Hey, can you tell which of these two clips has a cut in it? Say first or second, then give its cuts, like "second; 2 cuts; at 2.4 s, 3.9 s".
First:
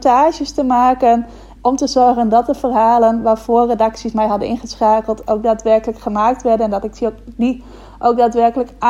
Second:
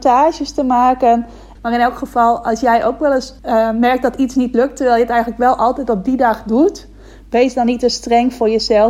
second; 2 cuts; at 1.6 s, 3.4 s